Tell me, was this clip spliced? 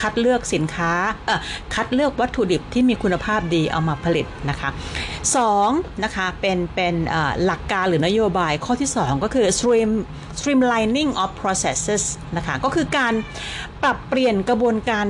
no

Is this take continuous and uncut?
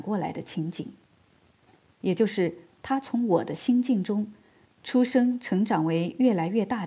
yes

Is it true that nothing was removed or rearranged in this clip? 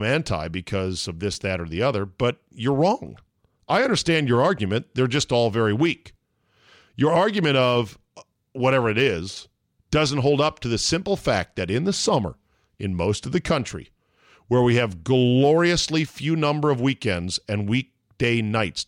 yes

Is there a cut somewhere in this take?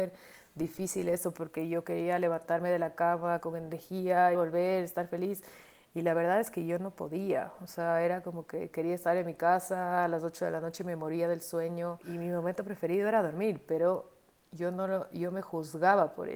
yes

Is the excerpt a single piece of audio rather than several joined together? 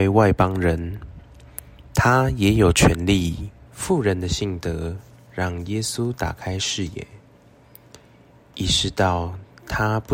no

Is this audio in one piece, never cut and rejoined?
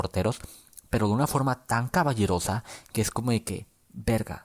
yes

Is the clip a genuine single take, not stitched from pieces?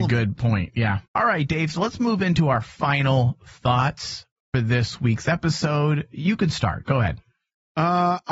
no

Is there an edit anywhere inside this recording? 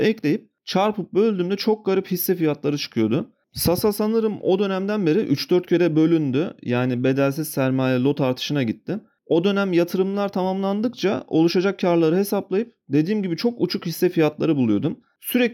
no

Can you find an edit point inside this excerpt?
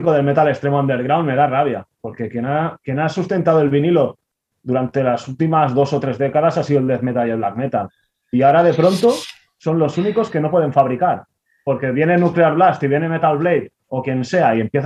no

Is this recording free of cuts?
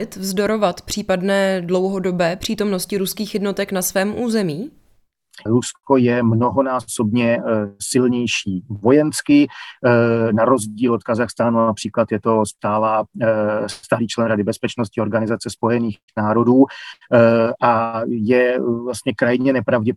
no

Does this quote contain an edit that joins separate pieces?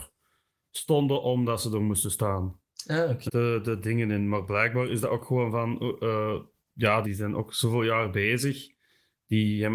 yes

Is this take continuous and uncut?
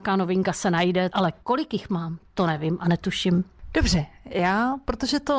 no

